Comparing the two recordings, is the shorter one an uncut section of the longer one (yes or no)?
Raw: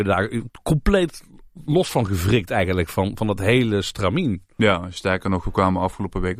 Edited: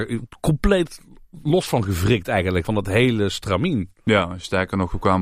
no